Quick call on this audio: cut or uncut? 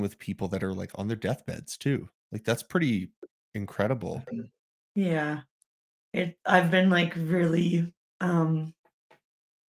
uncut